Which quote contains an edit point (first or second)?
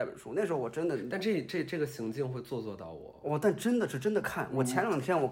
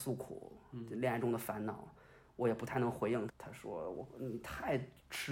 second